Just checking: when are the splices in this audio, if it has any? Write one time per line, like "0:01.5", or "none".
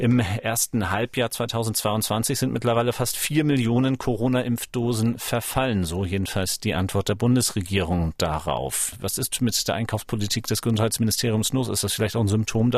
none